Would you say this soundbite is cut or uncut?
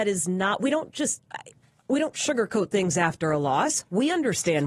uncut